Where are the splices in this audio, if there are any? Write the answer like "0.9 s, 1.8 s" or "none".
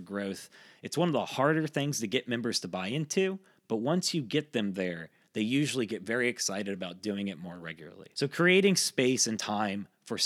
8.1 s